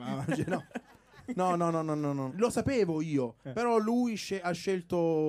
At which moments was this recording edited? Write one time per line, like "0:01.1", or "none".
0:02.3